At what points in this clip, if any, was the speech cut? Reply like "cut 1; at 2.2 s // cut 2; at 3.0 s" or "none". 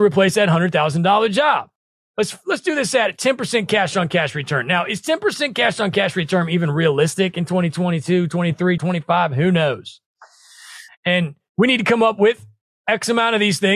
cut 1; at 8.8 s // cut 2; at 10.9 s

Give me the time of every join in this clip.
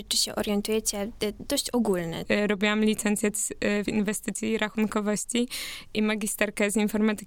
cut 1; at 2.3 s // cut 2; at 3.9 s

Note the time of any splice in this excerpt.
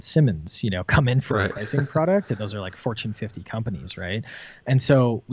none

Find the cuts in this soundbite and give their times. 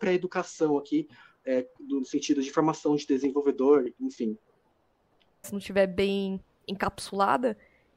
cut 1; at 5.4 s

